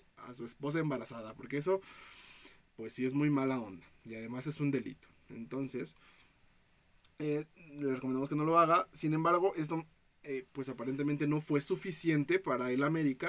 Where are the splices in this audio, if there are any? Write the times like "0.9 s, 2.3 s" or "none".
none